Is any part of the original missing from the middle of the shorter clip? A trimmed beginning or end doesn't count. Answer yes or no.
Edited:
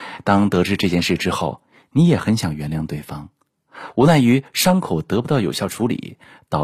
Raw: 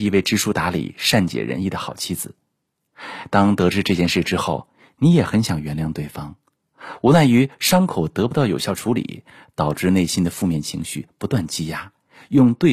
no